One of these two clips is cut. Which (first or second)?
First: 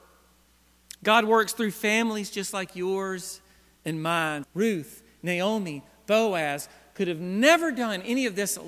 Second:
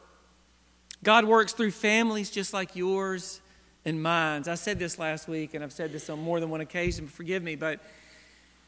first